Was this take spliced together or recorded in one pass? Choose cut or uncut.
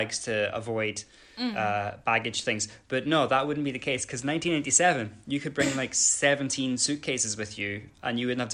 uncut